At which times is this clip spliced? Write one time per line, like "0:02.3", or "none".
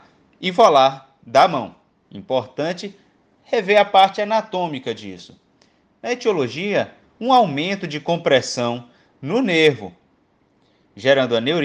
0:02.0

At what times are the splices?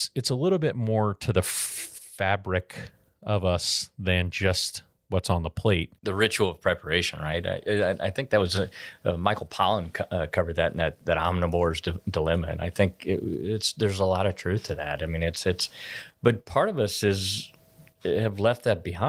none

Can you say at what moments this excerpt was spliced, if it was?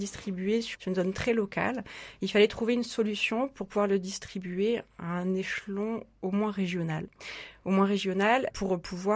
none

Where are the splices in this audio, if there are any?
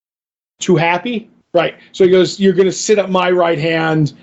0:01.4

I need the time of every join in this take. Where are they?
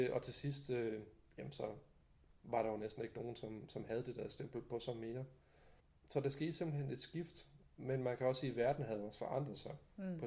none

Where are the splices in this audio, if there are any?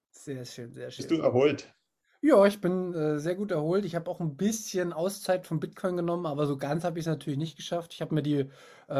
none

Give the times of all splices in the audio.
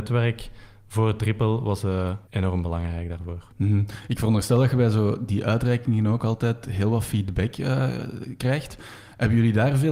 0:02.3

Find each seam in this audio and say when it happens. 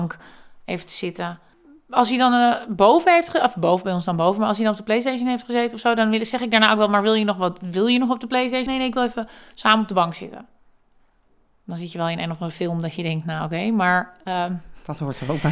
0:08.7

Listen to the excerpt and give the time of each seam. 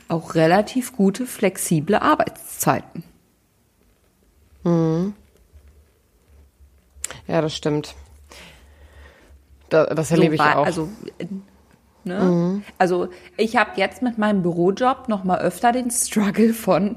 none

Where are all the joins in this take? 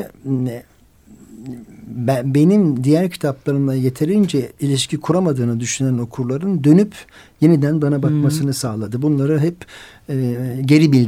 none

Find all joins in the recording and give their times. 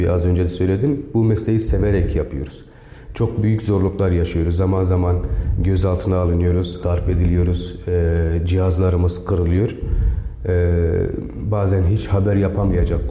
0:06.8

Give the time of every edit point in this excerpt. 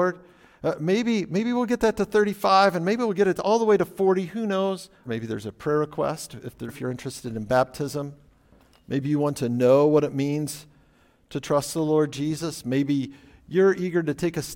0:05.1
0:06.7

